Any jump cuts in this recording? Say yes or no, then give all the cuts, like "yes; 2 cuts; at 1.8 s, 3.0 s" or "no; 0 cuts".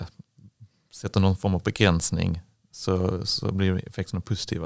no; 0 cuts